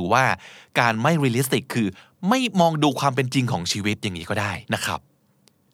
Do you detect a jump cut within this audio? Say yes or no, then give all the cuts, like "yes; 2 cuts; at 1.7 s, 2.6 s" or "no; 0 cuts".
yes; 1 cut; at 4.6 s